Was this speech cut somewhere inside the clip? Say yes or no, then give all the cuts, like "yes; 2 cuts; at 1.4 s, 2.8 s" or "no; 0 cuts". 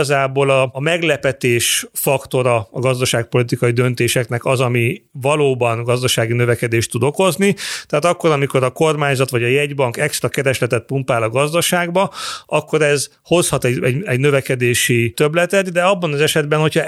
no; 0 cuts